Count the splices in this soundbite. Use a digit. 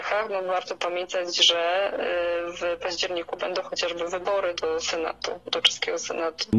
1